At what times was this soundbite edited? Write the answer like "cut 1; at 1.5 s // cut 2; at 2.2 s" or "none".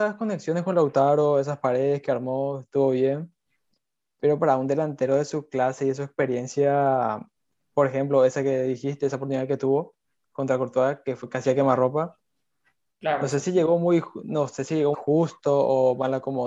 cut 1; at 14.9 s